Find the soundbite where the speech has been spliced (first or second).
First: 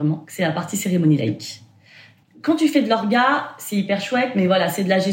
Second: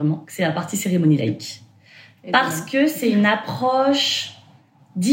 first